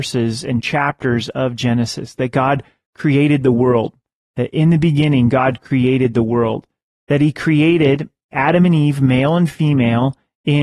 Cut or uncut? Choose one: uncut